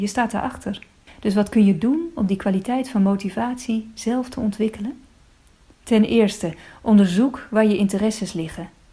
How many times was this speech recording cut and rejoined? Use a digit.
0